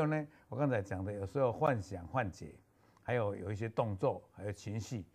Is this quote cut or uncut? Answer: uncut